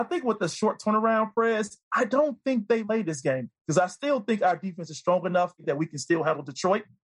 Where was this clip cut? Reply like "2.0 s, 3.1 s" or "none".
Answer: none